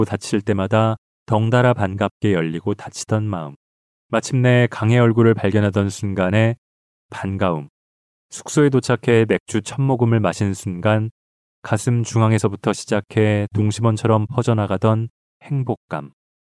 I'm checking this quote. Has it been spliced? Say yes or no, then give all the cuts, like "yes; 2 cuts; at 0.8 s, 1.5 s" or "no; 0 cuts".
yes; 1 cut; at 8.2 s